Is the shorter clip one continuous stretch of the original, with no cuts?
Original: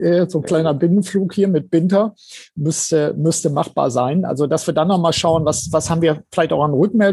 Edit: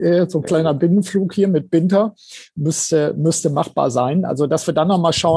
yes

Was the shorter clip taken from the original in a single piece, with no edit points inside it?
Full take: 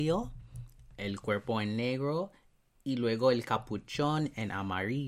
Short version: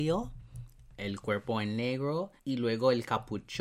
no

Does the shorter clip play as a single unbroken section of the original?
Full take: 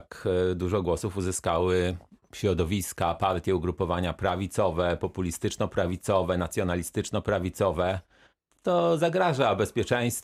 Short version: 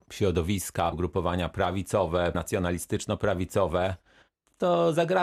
no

